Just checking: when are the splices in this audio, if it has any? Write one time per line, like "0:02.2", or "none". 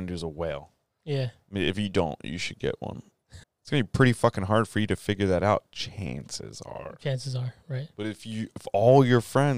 0:03.4